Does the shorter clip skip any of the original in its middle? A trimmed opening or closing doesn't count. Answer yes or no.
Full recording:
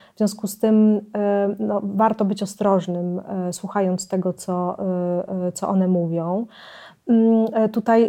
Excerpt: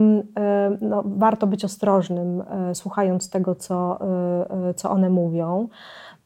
no